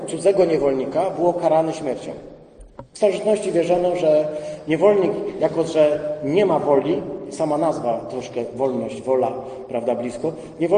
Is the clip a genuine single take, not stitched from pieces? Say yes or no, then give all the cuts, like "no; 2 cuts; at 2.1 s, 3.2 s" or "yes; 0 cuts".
no; 1 cut; at 2.9 s